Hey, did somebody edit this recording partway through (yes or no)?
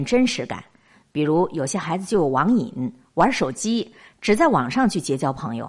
no